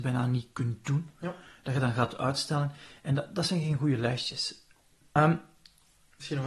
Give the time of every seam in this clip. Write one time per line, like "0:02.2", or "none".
0:05.2